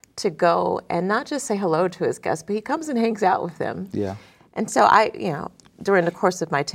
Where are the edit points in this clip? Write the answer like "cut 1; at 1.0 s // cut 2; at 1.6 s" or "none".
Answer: none